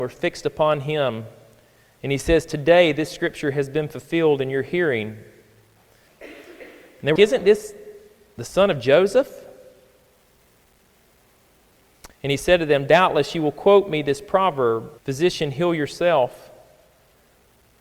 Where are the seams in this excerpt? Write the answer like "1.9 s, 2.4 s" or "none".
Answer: 6.1 s, 7.2 s, 15.0 s